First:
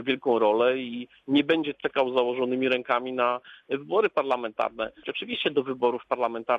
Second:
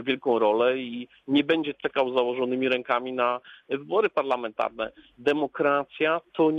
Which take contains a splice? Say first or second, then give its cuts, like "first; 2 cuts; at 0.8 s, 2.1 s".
first; 1 cut; at 5.0 s